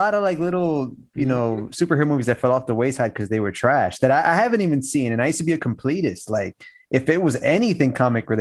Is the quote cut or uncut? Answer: uncut